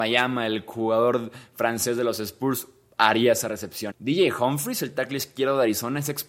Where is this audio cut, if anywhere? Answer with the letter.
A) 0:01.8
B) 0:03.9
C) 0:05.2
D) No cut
B